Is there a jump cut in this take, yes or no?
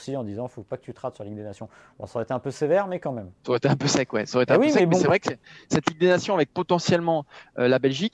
no